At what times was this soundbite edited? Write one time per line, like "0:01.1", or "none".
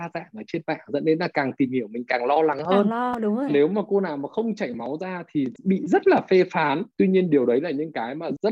0:03.5